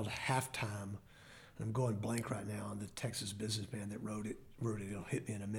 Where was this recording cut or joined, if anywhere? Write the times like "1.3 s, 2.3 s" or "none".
none